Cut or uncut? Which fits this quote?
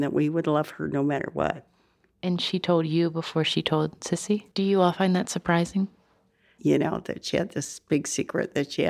cut